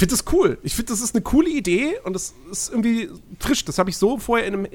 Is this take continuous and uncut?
yes; 0 cuts

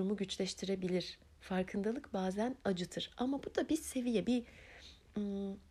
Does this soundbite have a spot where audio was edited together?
yes; 1 cut; at 4.2 s

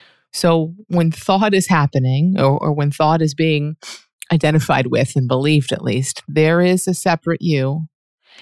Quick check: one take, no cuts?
yes; 0 cuts

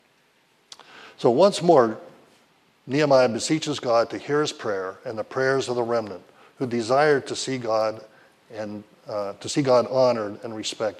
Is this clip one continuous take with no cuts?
yes; 0 cuts

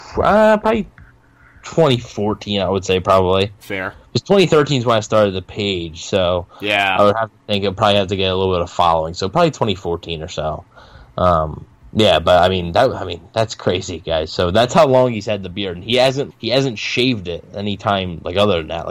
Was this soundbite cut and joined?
yes; 1 cut; at 16.3 s

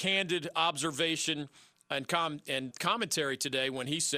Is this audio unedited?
no; 1 cut; at 2.7 s

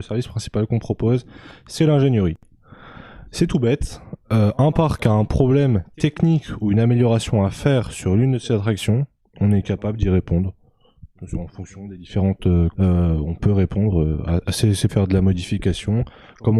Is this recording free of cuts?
no; 2 cuts; at 12.7 s, 14.9 s

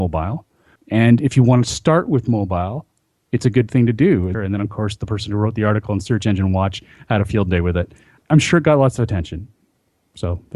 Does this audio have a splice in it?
yes; 1 cut; at 4.3 s

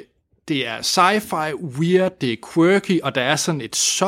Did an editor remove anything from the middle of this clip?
no; 0 cuts

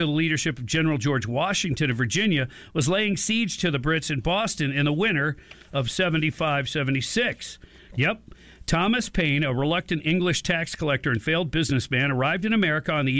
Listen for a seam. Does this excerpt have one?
yes; 1 cut; at 7.9 s

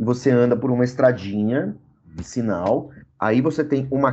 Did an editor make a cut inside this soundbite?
yes; 1 cut; at 3.0 s

